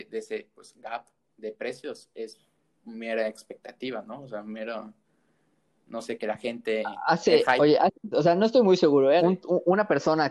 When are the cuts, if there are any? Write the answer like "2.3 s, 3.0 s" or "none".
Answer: 8.1 s, 9.2 s